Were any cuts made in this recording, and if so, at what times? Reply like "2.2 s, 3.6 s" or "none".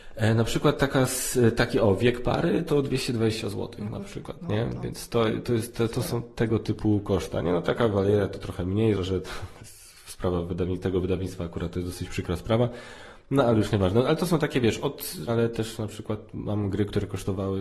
8.9 s, 15.3 s